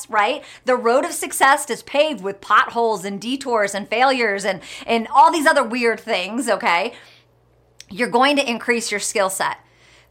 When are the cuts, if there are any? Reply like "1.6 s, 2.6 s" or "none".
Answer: none